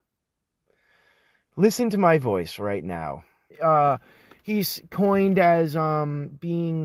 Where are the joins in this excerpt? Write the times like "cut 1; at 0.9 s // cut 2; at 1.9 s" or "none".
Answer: cut 1; at 3.5 s